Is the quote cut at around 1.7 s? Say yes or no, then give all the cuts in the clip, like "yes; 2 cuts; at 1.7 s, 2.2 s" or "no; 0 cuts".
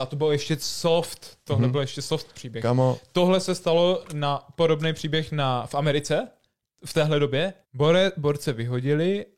no; 1 cut; at 7.6 s